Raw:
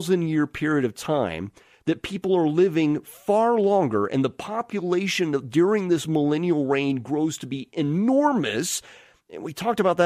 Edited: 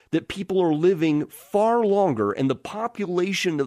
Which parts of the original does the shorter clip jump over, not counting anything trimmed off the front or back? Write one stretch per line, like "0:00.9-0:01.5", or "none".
none